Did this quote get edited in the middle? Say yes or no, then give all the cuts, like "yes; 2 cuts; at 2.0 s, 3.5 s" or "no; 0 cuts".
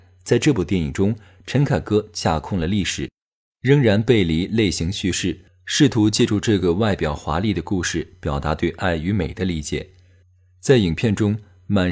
no; 0 cuts